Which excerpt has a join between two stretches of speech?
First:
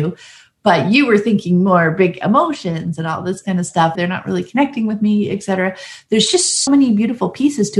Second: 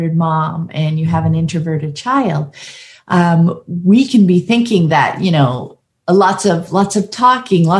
first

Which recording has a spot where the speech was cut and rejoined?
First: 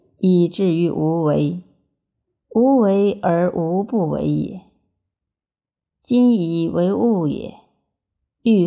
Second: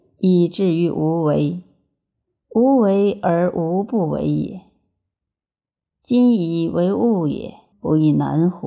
second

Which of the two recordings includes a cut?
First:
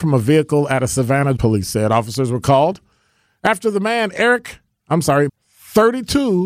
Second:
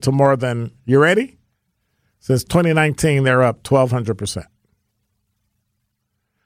first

